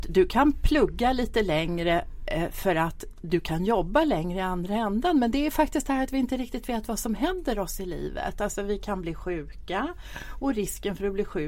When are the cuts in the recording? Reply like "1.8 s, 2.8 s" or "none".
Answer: none